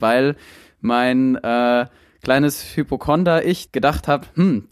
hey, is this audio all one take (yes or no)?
no